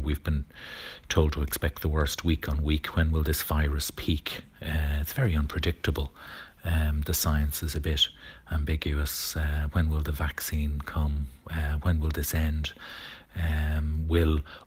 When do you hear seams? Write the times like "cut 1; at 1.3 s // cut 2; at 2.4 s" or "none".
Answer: none